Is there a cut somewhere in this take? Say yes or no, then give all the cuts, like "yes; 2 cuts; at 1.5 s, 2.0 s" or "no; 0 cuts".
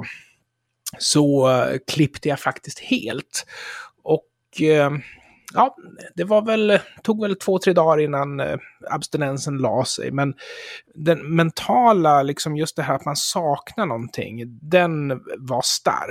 no; 0 cuts